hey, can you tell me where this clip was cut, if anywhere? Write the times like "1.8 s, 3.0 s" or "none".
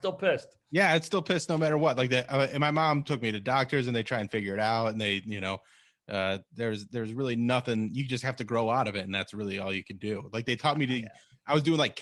none